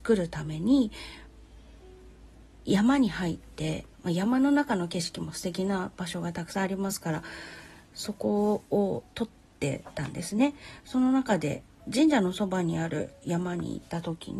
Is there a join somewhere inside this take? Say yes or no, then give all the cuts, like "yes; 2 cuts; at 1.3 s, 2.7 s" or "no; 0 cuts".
yes; 1 cut; at 3.9 s